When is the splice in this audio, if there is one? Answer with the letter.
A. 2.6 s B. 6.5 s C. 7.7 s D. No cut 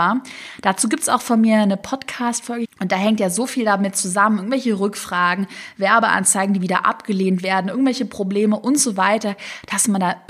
A